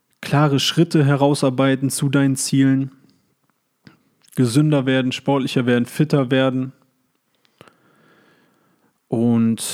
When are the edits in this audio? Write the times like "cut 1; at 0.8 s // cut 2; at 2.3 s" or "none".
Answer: none

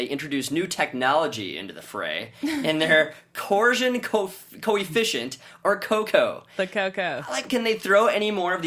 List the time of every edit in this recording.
cut 1; at 7.5 s

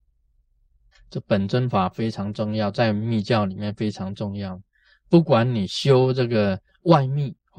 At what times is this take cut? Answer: cut 1; at 0.9 s

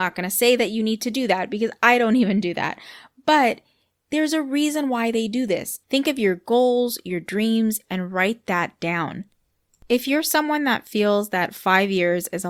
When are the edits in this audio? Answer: cut 1; at 5.8 s // cut 2; at 7.8 s

